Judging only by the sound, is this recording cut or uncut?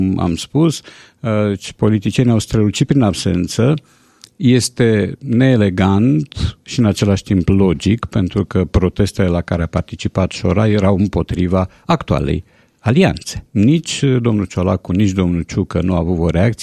cut